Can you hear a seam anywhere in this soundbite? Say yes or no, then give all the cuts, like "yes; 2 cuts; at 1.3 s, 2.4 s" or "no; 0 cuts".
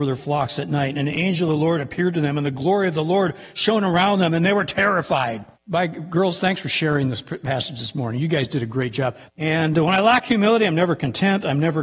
yes; 2 cuts; at 5.5 s, 9.3 s